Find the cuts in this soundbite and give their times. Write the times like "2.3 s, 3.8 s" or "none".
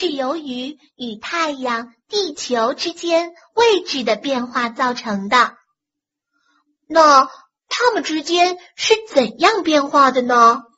none